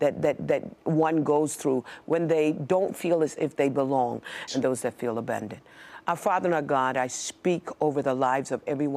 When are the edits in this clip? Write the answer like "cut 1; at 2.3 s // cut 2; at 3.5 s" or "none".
cut 1; at 4.5 s